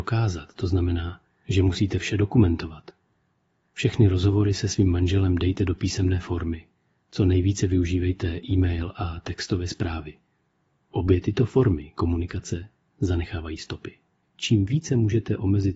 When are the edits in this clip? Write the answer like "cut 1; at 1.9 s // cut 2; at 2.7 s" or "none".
cut 1; at 14.2 s